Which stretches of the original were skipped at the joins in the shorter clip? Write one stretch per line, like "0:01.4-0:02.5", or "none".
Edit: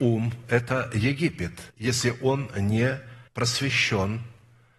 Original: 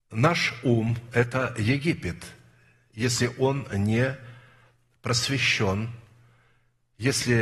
0:02.3-0:02.9
0:04.4-0:05.0